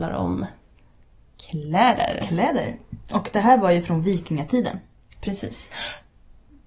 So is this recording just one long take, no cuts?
yes; 0 cuts

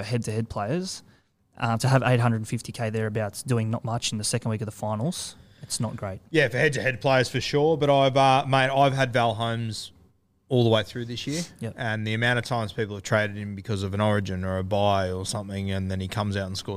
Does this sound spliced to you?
no; 0 cuts

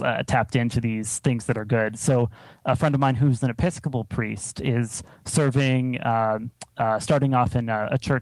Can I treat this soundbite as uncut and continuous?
yes; 0 cuts

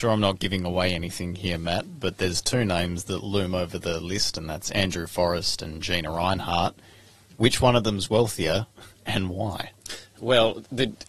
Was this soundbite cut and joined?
no; 0 cuts

